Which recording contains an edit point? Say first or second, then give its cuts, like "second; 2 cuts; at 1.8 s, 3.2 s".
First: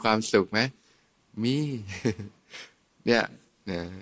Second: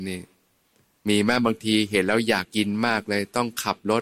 second; 1 cut; at 2.4 s